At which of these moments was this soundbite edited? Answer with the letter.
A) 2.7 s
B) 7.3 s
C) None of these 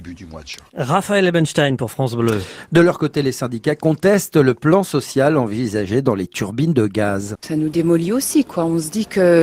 B